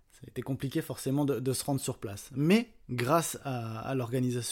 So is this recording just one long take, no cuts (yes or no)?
yes